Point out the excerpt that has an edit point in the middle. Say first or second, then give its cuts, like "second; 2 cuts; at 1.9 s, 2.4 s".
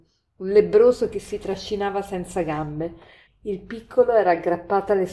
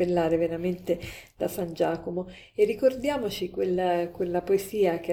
first; 1 cut; at 3.3 s